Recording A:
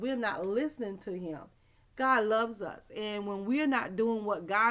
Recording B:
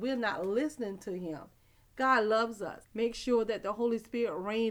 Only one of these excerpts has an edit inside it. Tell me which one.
B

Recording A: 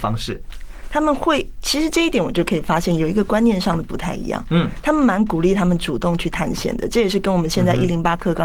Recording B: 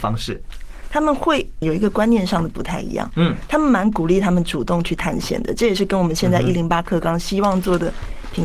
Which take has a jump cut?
B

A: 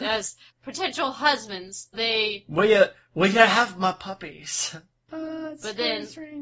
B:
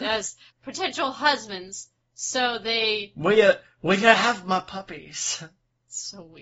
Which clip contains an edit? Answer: A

